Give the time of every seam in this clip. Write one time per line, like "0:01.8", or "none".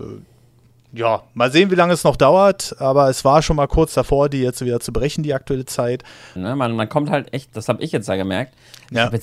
0:06.4